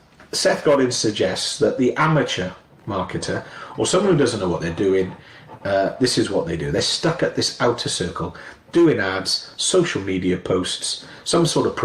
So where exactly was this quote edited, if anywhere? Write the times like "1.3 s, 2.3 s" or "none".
none